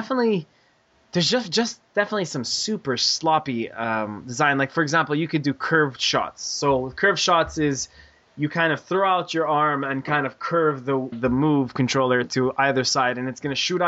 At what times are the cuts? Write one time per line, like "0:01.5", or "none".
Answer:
0:11.1

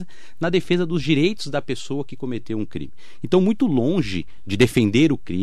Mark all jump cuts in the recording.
none

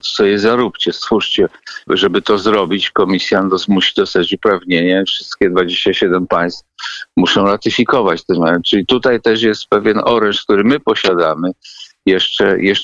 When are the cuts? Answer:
0:01.9

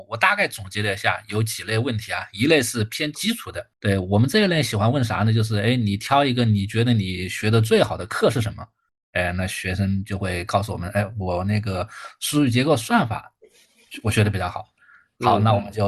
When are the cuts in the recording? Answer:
0:03.7

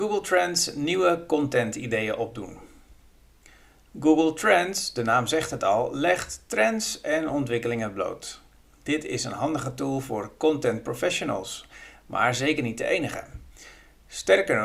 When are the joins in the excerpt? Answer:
none

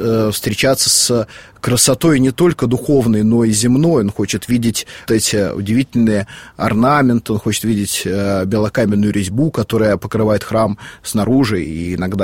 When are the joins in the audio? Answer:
0:05.1

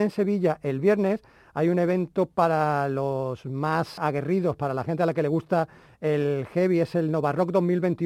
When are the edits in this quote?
0:04.0

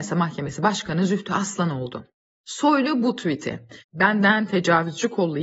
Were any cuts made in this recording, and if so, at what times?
0:02.3
0:03.8

